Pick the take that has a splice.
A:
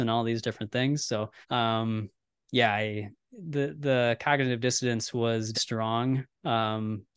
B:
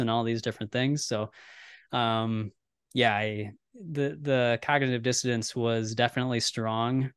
A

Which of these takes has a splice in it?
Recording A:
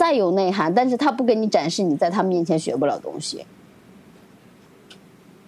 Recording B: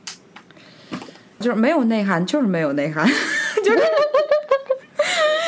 B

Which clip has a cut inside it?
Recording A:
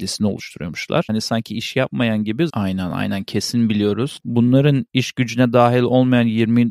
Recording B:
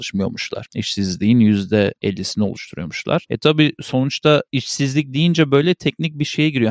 A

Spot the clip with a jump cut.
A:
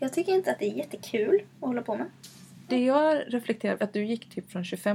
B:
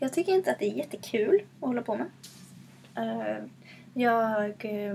A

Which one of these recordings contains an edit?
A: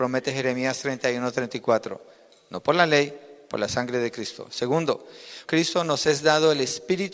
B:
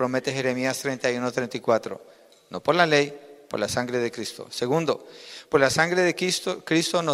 A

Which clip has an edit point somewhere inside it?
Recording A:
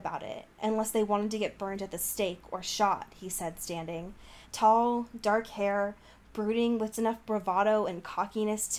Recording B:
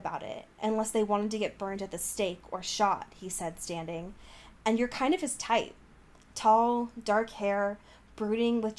A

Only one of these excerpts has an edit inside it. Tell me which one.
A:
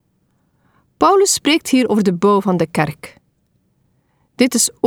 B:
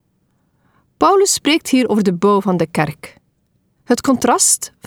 B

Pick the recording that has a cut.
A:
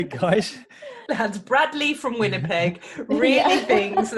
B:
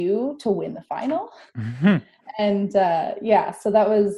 A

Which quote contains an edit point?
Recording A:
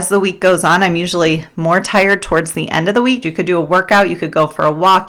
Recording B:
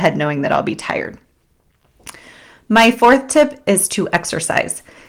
A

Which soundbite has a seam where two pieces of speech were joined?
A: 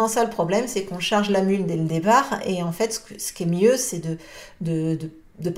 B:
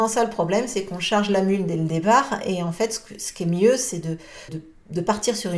B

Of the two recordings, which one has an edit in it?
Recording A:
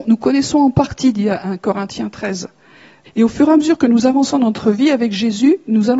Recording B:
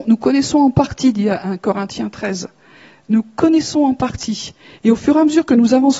A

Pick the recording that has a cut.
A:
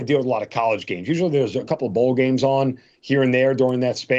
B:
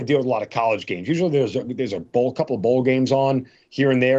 A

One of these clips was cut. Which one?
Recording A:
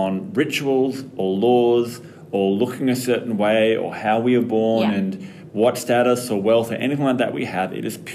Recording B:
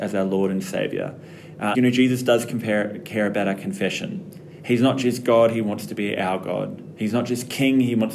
B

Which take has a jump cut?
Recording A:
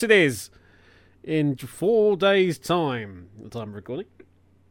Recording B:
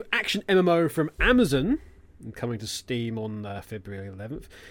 A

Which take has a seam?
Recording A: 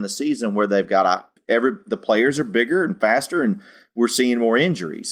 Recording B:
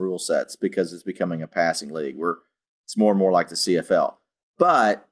A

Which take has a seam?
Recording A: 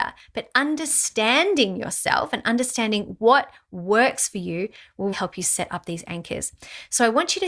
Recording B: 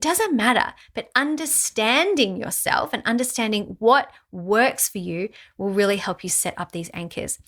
A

